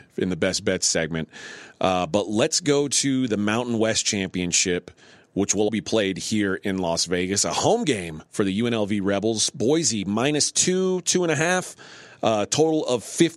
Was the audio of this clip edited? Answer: yes; 2 cuts; at 5.7 s, 8.3 s

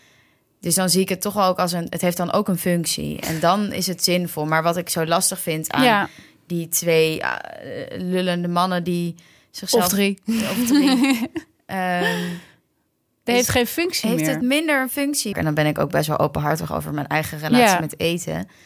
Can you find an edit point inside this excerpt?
yes; 1 cut; at 15.3 s

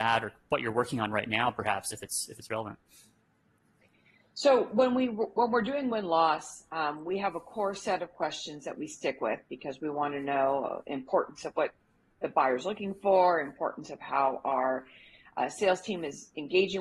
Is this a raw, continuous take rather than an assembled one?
yes; 0 cuts

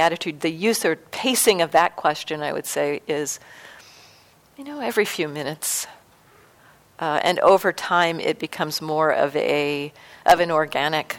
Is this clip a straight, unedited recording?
yes; 0 cuts

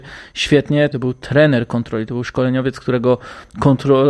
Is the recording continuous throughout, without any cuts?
no; 1 cut; at 0.9 s

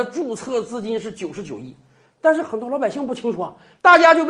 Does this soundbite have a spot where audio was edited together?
no; 0 cuts

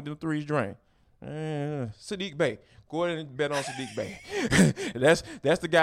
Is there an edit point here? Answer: no; 0 cuts

